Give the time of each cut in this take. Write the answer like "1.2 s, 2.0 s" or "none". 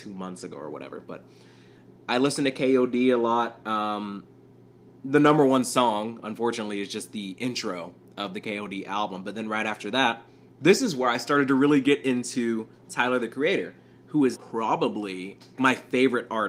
14.3 s, 15.6 s